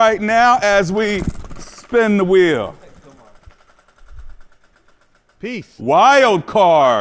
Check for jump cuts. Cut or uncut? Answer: cut